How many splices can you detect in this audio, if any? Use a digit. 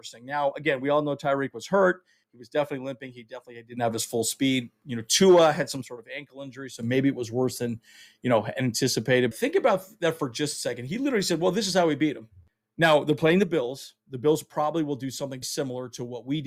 2